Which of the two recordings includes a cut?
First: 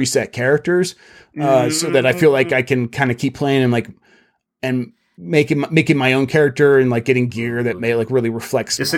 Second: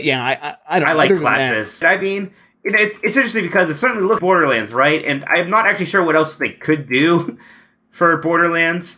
second; 2 cuts; at 1.8 s, 4.2 s

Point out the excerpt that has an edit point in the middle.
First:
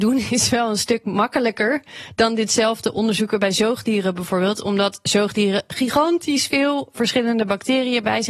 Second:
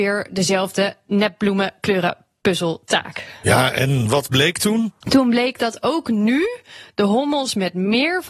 second; 1 cut; at 5.0 s

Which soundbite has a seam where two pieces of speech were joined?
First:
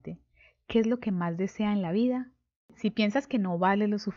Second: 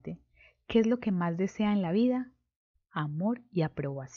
first; 1 cut; at 2.7 s

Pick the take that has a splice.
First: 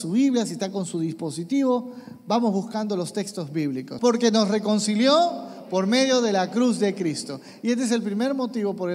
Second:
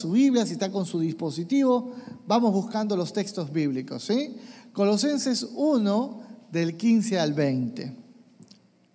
first; 1 cut; at 4.0 s

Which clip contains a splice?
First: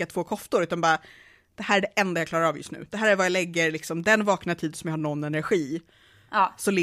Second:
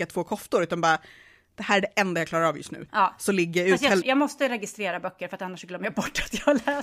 second; 2 cuts; at 2.9 s, 4.0 s

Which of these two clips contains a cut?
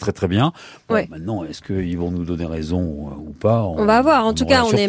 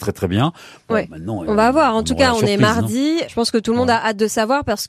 second; 2 cuts; at 1.5 s, 3.2 s

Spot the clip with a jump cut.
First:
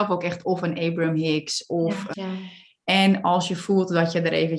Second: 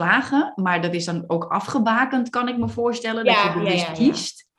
first; 1 cut; at 2.1 s

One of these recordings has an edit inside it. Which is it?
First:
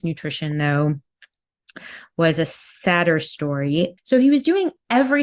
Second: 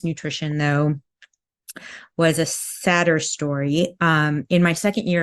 first; 1 cut; at 4.0 s

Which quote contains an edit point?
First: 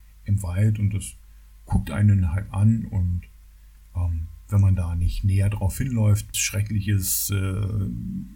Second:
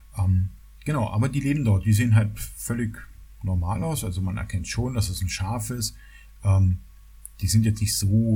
first; 1 cut; at 6.3 s

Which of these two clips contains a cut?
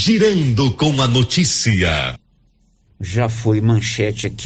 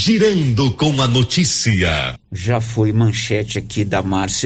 second; 1 cut; at 2.2 s

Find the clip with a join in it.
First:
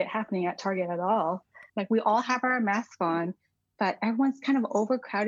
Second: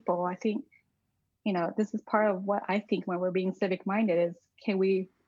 first; 1 cut; at 1.7 s

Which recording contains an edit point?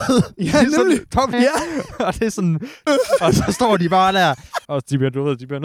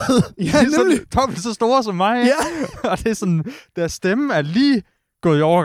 first; 3 cuts; at 1.3 s, 2.9 s, 4.6 s

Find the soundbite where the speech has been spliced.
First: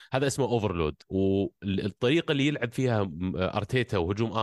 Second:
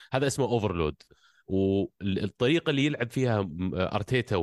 first; 1 cut; at 1.0 s

